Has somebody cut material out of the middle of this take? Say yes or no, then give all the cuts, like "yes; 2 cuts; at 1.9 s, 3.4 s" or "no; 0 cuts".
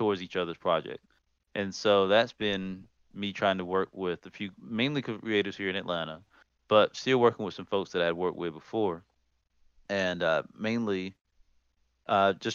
no; 0 cuts